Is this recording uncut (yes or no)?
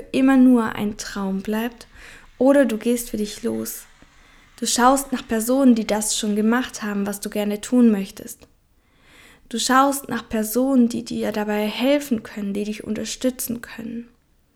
yes